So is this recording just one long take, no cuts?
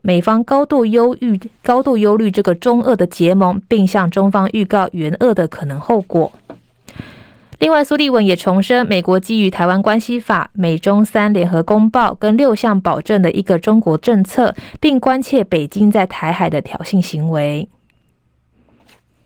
yes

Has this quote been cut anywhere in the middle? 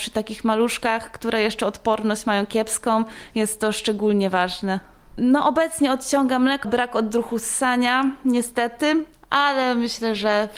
yes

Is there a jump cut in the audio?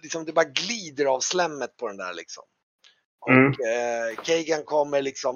no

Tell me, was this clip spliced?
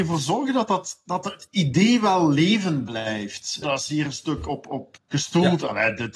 yes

